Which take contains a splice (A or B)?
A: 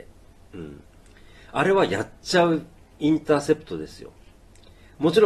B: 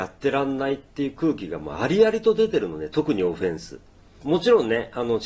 B